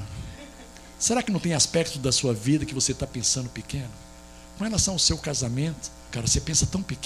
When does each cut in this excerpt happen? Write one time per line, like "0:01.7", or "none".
0:06.1